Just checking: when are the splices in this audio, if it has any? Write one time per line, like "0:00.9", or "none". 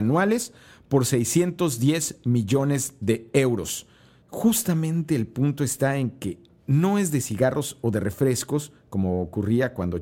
0:04.2